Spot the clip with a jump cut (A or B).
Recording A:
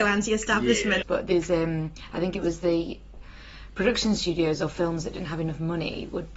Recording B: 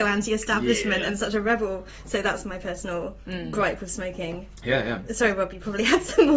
A